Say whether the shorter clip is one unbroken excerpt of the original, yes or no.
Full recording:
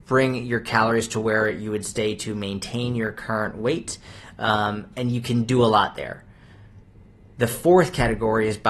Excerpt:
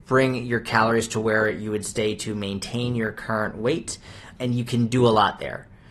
no